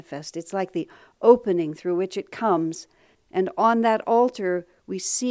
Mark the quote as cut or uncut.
cut